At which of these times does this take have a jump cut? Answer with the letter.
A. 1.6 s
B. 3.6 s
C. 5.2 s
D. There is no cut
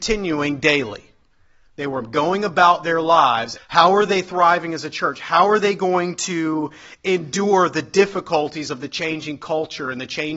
B